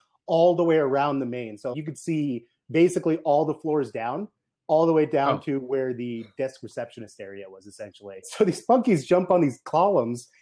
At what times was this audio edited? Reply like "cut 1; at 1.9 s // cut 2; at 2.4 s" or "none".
cut 1; at 1.7 s // cut 2; at 8.2 s